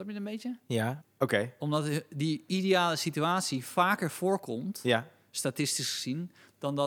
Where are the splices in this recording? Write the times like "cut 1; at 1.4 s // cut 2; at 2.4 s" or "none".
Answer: cut 1; at 1.0 s